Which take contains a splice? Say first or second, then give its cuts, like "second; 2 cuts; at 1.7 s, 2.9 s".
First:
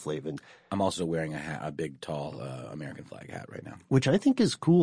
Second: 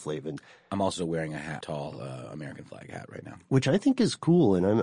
second; 1 cut; at 1.6 s